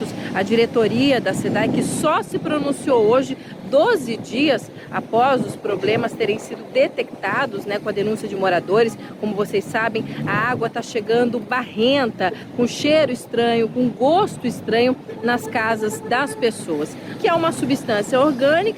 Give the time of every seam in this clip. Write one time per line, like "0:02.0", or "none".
0:17.2